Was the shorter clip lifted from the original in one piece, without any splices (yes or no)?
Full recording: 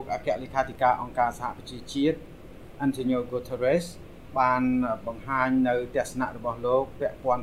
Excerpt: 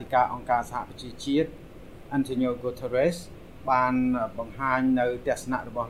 yes